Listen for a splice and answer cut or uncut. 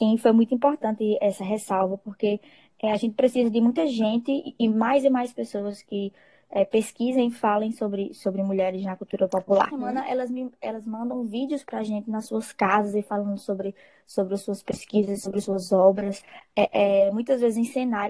cut